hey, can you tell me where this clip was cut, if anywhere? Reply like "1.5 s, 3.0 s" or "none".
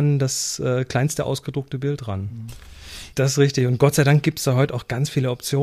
3.1 s